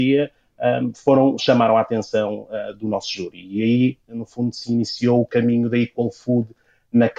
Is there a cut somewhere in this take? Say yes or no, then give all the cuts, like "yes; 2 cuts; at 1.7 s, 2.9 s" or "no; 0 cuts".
no; 0 cuts